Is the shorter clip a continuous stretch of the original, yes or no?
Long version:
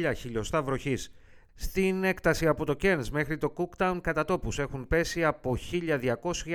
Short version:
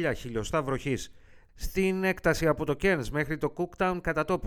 yes